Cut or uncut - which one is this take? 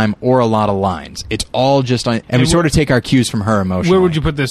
cut